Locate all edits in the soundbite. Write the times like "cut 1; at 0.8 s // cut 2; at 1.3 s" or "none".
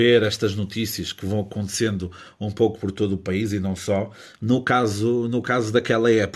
none